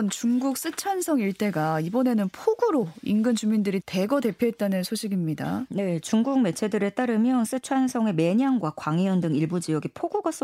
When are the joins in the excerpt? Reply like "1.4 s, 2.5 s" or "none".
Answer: 3.8 s